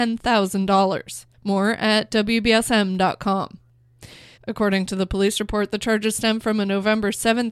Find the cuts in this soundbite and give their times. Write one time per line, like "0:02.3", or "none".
0:04.4